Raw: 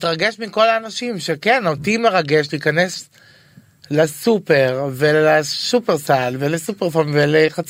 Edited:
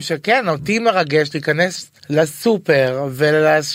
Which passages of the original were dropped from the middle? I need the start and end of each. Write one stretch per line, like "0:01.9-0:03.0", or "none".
0:03.2-0:03.8